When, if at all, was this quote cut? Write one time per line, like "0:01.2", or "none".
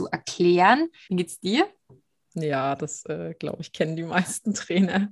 0:01.1